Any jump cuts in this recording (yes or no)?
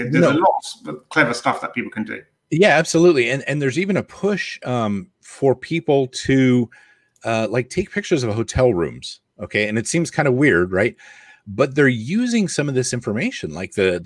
no